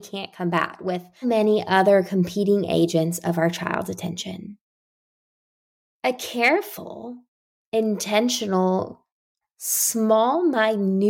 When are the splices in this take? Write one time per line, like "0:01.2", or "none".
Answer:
0:01.2
0:09.4